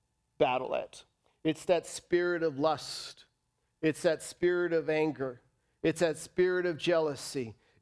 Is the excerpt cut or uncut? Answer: uncut